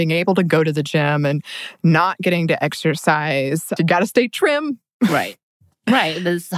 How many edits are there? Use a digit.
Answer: 1